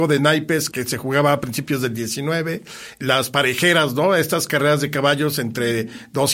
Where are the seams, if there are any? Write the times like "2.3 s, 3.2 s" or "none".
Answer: none

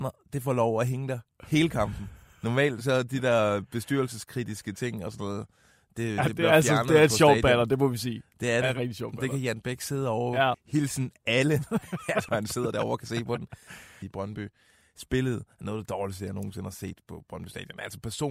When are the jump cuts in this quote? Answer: 10.5 s, 12.3 s, 14.0 s

